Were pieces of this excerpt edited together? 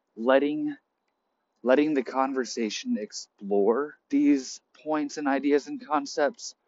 yes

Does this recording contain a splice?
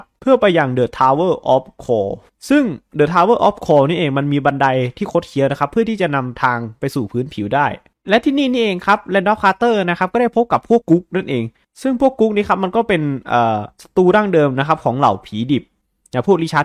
yes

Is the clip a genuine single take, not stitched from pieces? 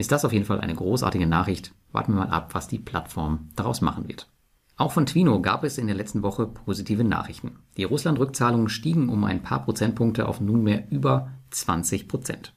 yes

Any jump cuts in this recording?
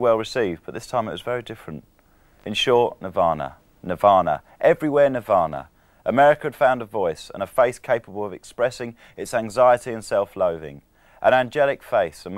no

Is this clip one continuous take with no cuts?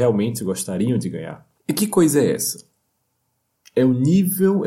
no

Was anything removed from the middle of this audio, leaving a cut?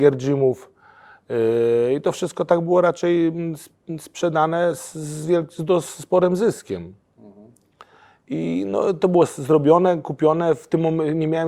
no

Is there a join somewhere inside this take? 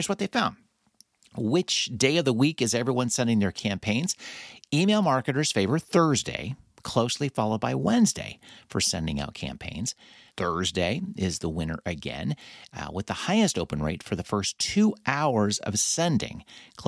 yes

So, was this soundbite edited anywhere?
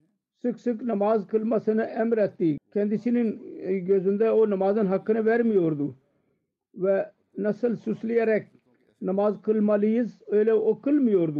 yes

